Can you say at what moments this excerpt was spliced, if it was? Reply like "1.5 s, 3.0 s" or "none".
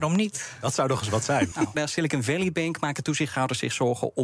1.7 s